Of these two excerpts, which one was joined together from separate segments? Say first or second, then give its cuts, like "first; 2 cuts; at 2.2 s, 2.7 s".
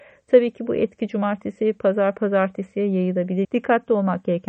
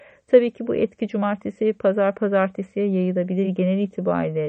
first; 1 cut; at 3.4 s